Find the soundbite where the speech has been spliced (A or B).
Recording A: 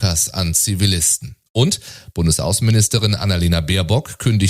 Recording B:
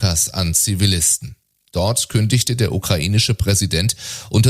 A